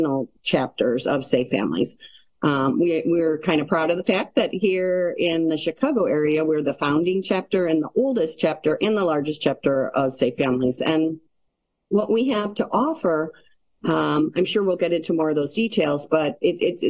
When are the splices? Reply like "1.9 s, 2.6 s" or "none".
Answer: 10.8 s